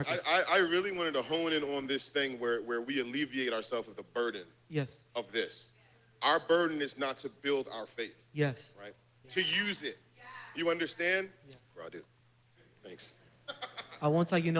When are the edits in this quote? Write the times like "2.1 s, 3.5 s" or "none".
9.2 s, 11.7 s

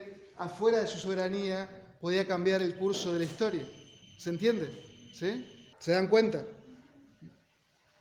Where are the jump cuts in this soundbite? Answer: 5.7 s

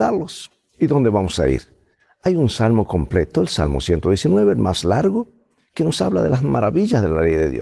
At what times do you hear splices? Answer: none

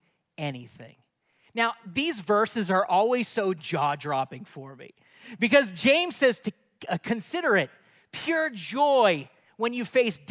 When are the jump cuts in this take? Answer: none

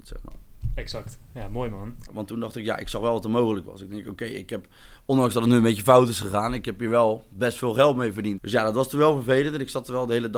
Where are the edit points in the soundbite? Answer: 2.1 s, 8.4 s

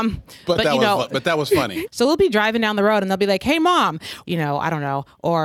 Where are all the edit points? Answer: 1.9 s, 4.2 s

